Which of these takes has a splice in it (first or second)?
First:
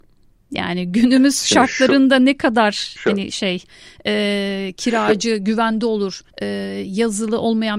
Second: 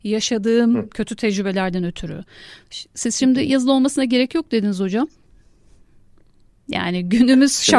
first